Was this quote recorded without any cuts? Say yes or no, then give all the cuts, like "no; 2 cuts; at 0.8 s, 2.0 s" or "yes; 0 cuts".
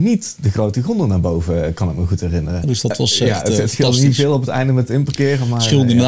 no; 1 cut; at 2.6 s